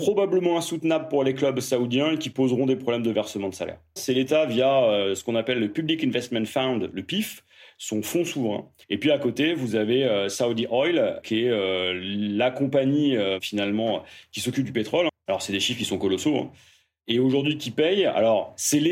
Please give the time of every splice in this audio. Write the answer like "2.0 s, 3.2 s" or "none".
4.0 s, 8.8 s, 15.1 s